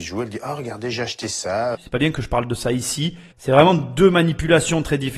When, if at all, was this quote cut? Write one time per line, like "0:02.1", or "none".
0:01.7
0:03.3